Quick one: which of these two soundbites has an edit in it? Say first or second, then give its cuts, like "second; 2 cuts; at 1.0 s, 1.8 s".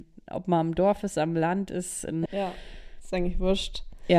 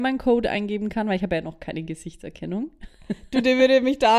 first; 1 cut; at 2.3 s